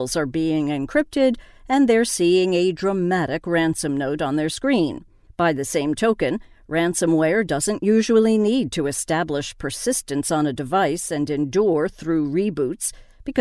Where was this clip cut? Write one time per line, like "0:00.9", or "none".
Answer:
0:05.3